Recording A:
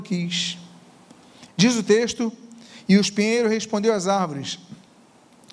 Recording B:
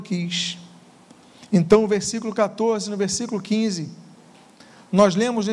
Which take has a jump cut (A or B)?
A